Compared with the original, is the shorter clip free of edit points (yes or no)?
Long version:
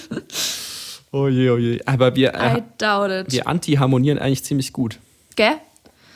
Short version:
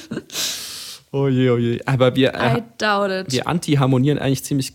yes